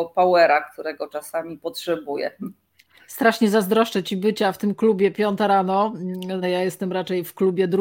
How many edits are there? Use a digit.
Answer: 1